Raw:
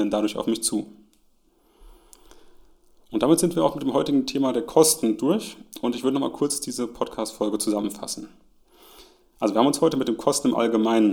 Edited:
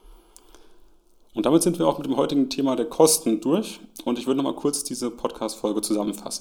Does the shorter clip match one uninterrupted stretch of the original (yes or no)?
yes